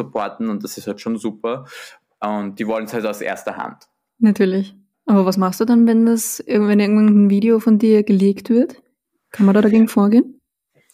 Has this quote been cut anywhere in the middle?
yes; 1 cut; at 4.9 s

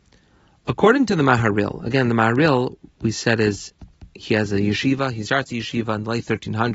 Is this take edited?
no; 0 cuts

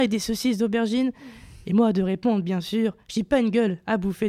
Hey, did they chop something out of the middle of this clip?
no; 0 cuts

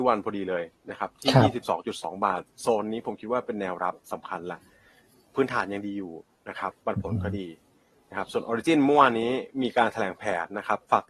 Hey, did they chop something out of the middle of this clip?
yes; 1 cut; at 6.7 s

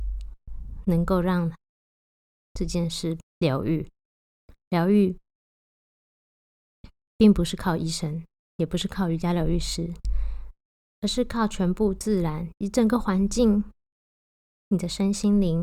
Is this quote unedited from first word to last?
yes; 0 cuts

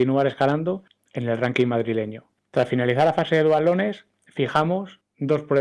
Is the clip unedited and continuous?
no; 1 cut; at 2.4 s

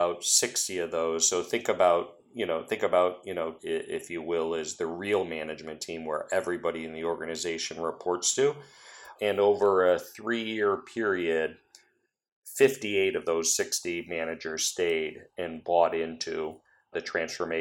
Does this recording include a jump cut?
yes; 1 cut; at 3.6 s

